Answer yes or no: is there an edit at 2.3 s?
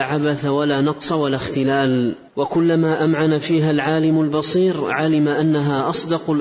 yes